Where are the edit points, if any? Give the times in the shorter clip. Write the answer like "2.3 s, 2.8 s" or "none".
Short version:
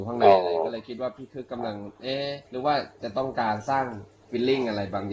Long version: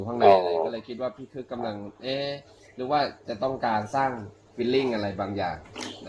2.5 s